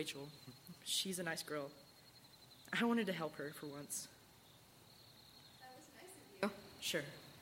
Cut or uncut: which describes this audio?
uncut